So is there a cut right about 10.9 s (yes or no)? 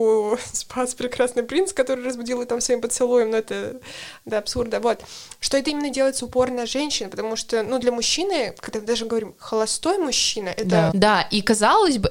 yes